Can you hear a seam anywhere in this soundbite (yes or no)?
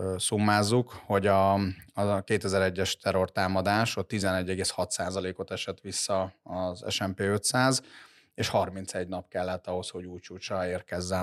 no